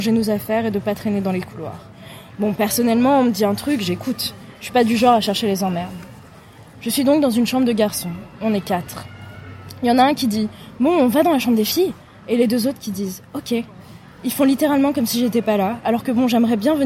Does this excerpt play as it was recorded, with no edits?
yes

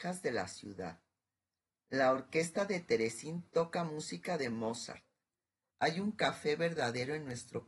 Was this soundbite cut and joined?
yes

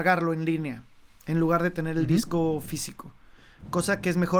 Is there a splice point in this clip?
no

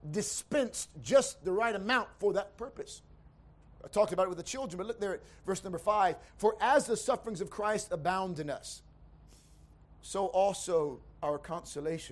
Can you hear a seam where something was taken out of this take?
no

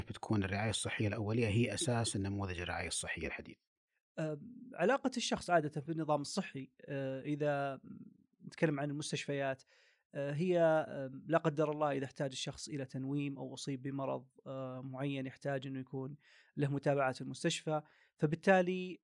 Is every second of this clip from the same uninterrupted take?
yes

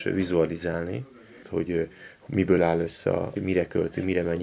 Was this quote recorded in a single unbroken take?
no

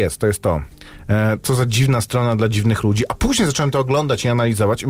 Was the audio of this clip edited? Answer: no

